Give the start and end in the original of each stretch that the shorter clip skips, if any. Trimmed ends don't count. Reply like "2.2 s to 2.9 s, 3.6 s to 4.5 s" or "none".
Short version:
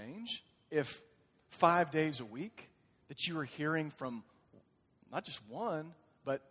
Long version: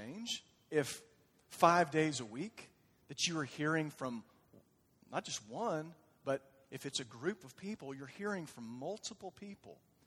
none